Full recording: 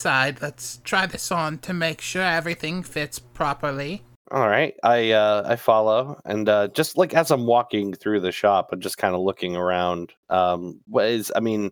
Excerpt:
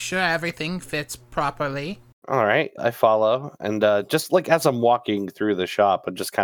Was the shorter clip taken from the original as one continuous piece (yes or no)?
no